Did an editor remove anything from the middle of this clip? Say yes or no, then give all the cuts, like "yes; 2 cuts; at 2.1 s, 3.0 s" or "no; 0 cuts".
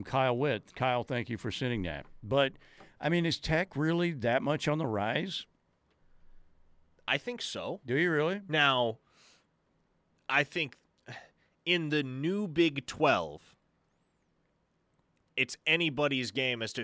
no; 0 cuts